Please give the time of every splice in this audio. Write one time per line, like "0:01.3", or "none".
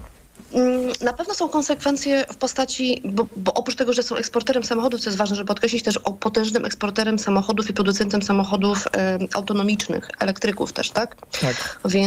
0:03.3